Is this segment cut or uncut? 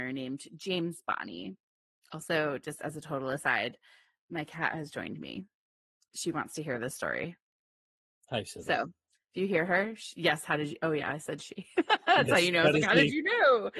uncut